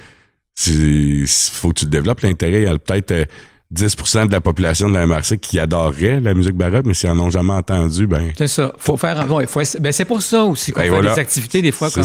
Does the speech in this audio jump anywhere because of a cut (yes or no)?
yes